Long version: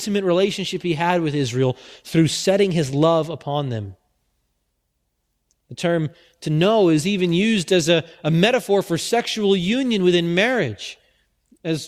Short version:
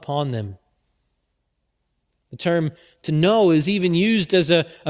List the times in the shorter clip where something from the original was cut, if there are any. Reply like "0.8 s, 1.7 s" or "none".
none